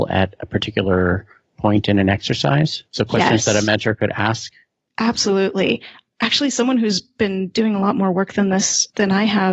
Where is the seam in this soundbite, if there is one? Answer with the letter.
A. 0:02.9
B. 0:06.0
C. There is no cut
A